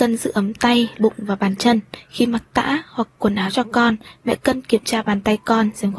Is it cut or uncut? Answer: cut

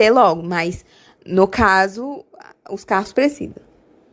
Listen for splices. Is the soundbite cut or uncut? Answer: uncut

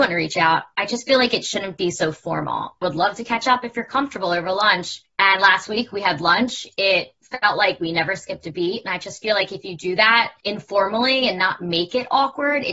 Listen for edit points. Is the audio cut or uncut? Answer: cut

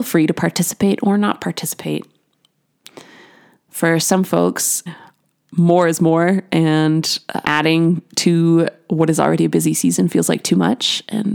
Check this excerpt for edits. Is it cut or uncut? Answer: cut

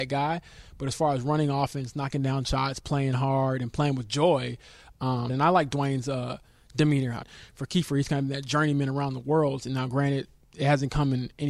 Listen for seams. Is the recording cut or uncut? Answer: cut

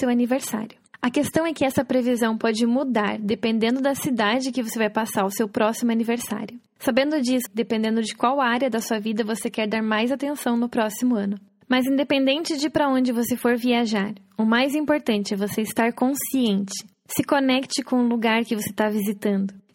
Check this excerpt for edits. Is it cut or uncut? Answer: cut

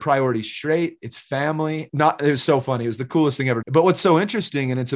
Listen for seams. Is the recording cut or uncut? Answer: cut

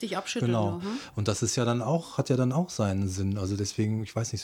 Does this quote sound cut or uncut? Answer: uncut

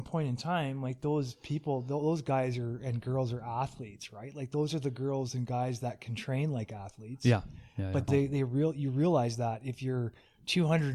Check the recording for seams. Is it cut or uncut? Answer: cut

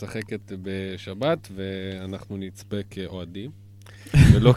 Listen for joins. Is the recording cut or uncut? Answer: uncut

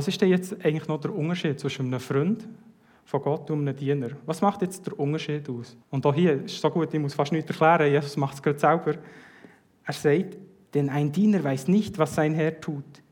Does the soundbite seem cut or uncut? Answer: cut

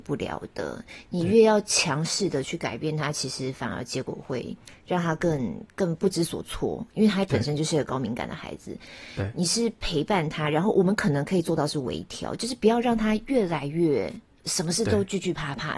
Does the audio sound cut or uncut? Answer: uncut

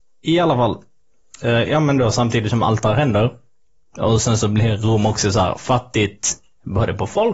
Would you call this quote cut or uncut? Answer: uncut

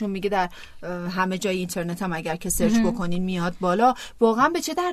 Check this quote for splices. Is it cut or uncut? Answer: uncut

